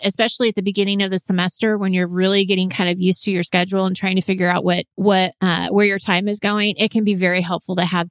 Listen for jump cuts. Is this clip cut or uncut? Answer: cut